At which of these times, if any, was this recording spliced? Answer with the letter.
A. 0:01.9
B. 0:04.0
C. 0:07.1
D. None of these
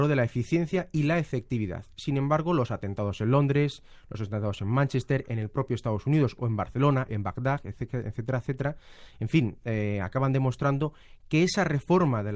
C